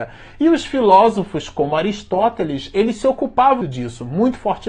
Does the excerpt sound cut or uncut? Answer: cut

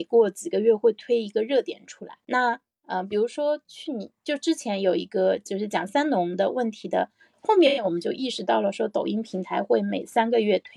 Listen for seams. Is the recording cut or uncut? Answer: cut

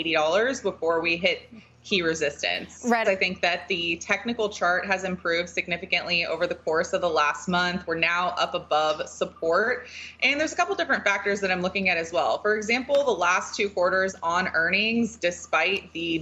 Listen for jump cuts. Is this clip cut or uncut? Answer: cut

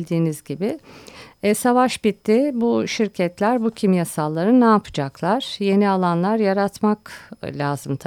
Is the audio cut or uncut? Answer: uncut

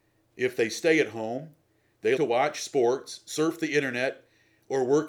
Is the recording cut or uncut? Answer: cut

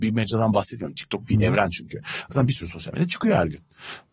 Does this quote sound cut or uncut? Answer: cut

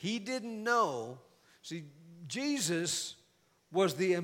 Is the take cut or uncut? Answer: uncut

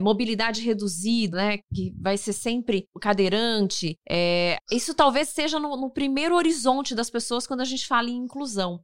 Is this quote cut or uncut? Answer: cut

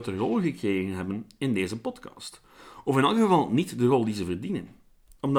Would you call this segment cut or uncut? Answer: uncut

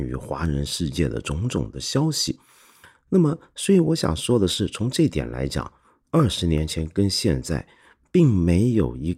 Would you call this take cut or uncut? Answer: uncut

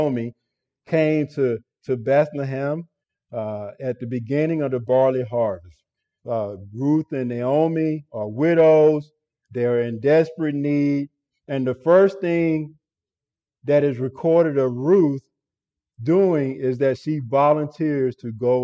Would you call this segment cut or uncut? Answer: uncut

